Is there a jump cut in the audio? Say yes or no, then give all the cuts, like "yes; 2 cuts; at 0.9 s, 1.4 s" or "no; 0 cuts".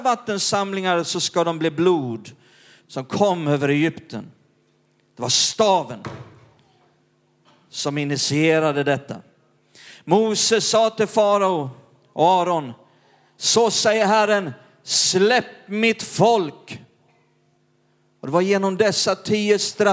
yes; 1 cut; at 2.8 s